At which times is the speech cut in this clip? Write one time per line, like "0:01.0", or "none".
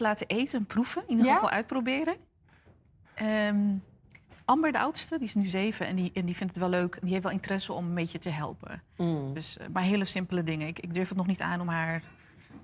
none